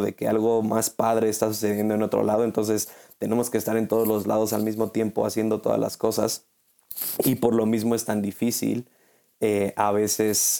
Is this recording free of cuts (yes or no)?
yes